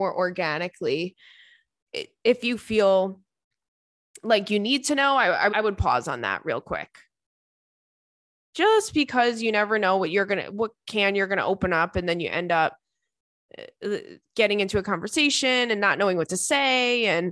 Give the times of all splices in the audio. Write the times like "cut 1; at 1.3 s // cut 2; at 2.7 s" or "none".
cut 1; at 5.5 s